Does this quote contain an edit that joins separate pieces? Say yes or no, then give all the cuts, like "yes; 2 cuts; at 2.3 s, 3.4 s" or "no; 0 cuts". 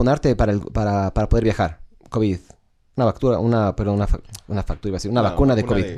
no; 0 cuts